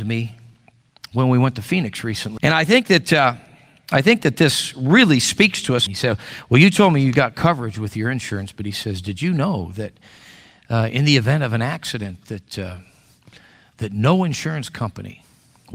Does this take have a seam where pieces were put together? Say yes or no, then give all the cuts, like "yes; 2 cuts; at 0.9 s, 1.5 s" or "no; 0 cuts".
yes; 2 cuts; at 2.4 s, 5.9 s